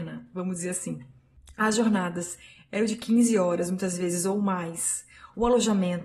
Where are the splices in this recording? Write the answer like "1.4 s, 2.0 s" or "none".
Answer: 1.5 s